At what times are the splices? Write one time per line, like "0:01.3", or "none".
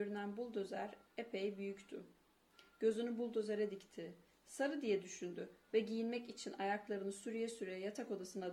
none